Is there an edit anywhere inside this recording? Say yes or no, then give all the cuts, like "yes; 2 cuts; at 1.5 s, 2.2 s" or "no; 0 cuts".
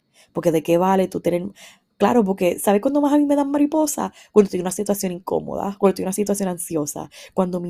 no; 0 cuts